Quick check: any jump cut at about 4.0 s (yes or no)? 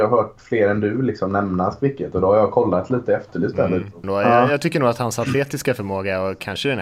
yes